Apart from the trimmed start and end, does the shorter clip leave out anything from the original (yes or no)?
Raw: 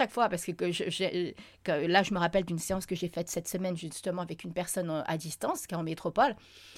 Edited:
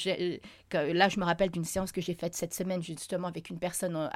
no